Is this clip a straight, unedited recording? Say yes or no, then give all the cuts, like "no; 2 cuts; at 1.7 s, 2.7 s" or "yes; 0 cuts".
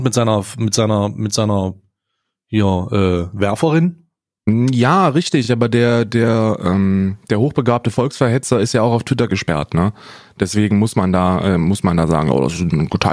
yes; 0 cuts